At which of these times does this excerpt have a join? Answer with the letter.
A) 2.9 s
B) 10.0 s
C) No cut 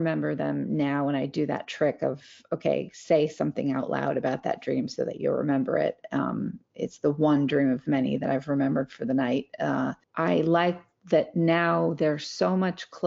B